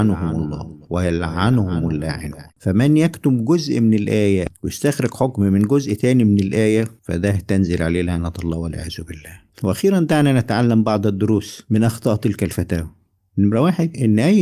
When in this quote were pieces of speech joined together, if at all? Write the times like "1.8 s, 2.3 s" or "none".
2.5 s, 9.5 s